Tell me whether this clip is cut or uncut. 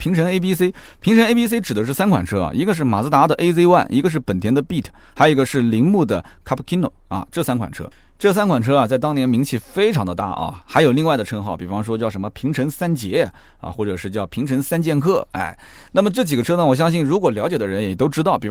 uncut